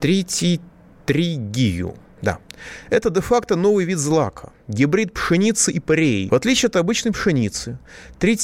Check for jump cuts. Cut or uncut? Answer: cut